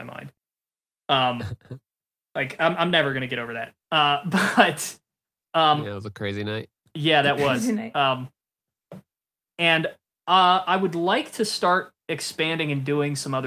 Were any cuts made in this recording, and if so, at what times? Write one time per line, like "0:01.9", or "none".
none